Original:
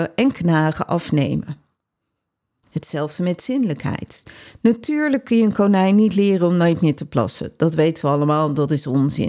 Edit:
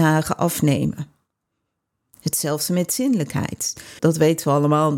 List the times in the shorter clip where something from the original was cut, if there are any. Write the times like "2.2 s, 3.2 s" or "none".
4.0 s